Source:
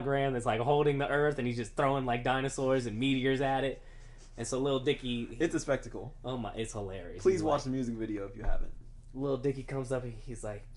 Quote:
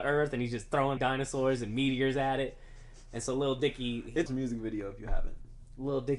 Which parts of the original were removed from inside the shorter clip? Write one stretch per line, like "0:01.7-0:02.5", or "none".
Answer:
0:02.0-0:02.2
0:05.5-0:07.6